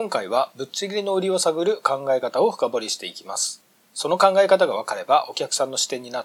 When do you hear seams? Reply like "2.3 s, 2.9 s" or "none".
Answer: none